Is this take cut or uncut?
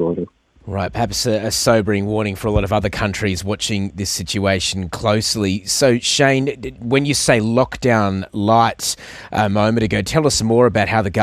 uncut